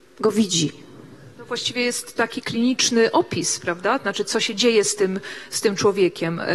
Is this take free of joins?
yes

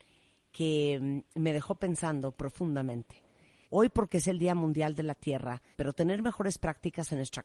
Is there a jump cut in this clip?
yes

